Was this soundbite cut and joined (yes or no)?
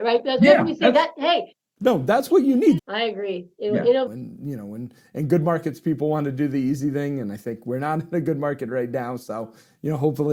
yes